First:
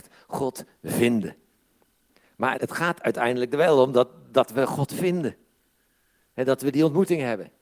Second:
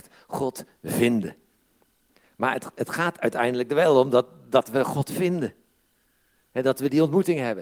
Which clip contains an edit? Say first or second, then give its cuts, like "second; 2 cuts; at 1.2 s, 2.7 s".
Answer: first; 1 cut; at 2.5 s